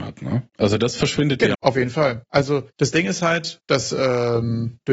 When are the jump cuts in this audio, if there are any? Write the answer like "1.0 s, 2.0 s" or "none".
1.5 s